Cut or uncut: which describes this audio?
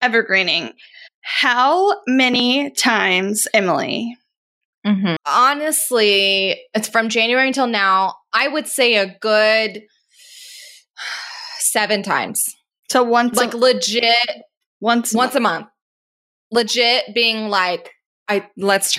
cut